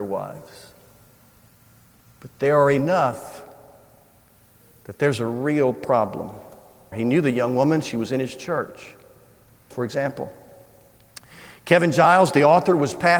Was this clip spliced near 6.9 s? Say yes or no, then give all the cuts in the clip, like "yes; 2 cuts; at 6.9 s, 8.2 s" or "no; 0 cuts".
yes; 2 cuts; at 6.9 s, 9.7 s